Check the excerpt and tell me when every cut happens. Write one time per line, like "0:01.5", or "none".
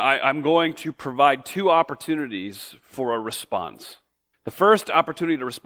0:04.3